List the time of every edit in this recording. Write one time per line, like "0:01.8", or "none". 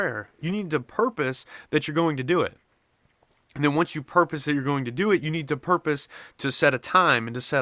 none